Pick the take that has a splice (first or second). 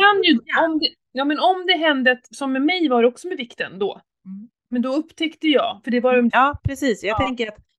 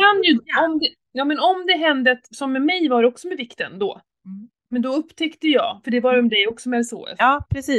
first